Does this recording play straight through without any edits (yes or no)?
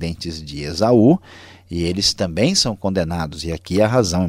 yes